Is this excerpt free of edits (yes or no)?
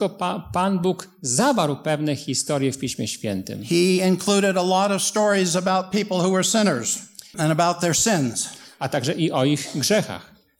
no